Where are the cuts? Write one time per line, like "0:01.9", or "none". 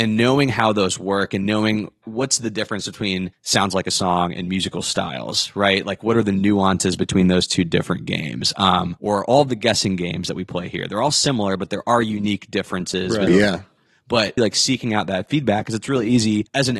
0:13.3
0:14.4

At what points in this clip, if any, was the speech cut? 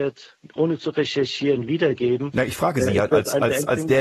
none

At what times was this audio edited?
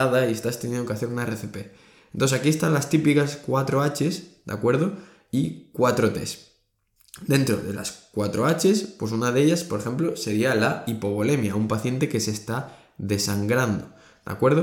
none

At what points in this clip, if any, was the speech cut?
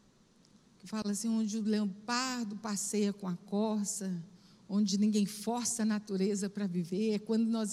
none

